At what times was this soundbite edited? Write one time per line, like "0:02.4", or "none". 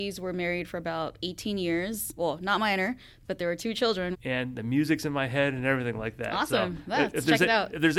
0:02.2
0:04.1